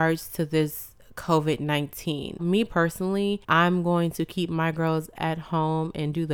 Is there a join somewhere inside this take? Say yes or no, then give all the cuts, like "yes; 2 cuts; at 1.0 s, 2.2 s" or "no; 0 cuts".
yes; 2 cuts; at 2.4 s, 3.4 s